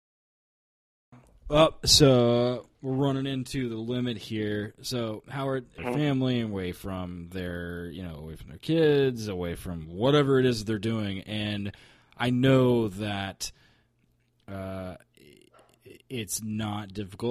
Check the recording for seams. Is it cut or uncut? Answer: cut